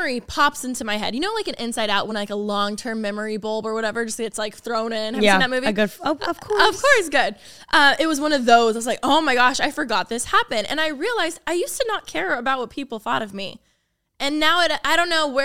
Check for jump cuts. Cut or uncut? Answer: uncut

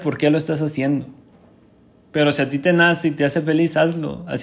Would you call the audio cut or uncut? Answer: uncut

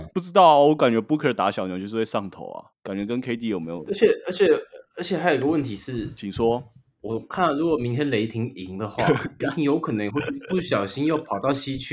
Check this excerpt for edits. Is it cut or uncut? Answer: uncut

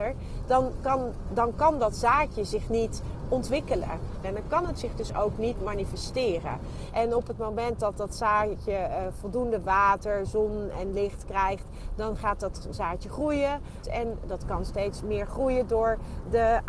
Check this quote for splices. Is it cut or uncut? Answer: cut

